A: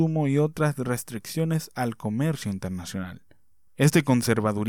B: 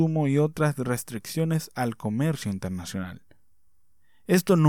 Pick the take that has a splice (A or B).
A